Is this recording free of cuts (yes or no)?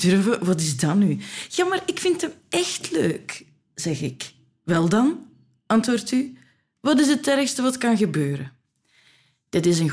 yes